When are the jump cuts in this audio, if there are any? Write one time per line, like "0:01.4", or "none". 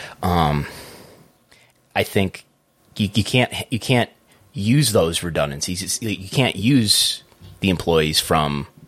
none